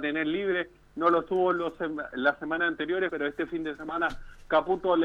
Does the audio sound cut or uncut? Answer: cut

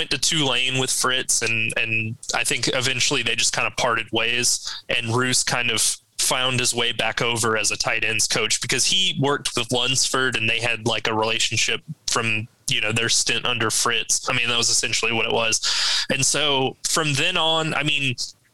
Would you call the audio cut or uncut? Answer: cut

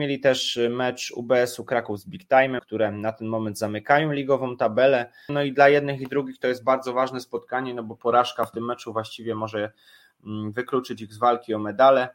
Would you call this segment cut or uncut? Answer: cut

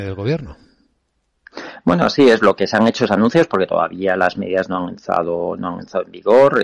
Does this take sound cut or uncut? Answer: uncut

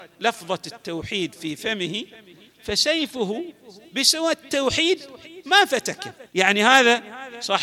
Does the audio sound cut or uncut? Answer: cut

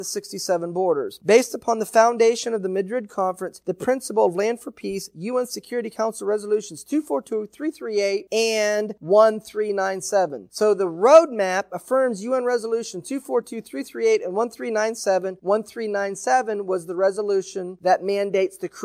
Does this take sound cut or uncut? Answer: uncut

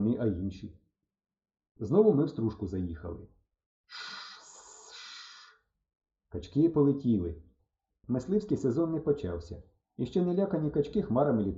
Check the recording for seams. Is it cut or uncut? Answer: uncut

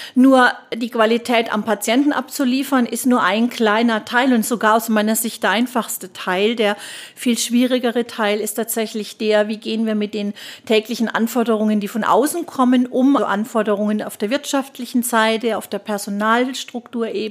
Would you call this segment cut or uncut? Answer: cut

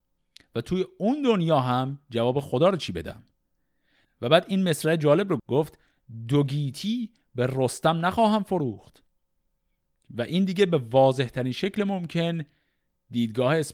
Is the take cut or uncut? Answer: cut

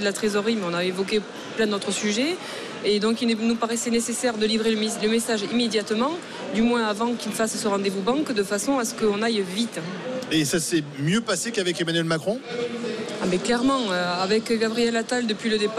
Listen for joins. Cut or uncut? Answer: uncut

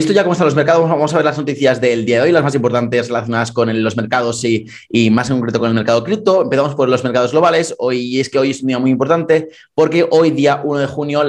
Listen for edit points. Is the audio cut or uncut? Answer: uncut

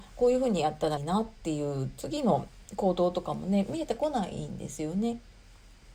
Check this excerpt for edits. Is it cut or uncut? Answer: cut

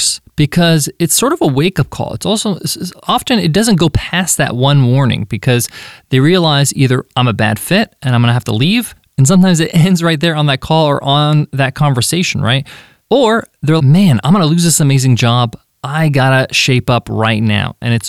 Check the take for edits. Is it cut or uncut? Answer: cut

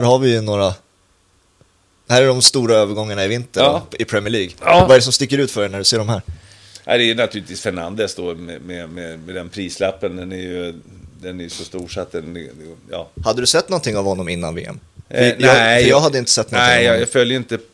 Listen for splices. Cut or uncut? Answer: uncut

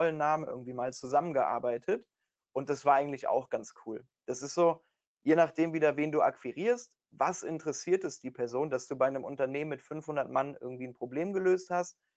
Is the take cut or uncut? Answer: uncut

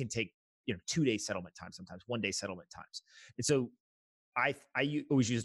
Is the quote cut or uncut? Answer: uncut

